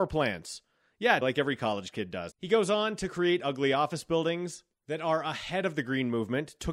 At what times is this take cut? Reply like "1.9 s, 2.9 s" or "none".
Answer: 1.2 s, 2.3 s